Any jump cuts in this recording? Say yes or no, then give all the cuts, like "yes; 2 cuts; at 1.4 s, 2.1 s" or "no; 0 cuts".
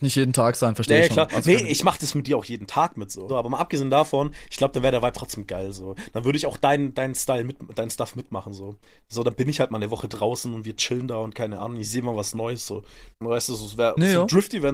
yes; 2 cuts; at 3.3 s, 13.1 s